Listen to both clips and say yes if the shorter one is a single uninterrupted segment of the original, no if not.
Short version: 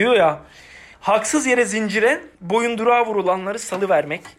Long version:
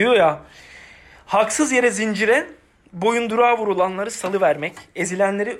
no